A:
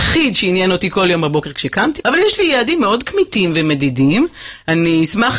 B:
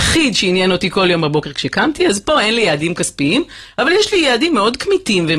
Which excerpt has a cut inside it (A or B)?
A